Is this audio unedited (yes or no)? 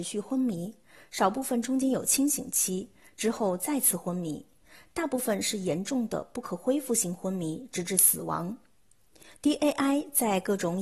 yes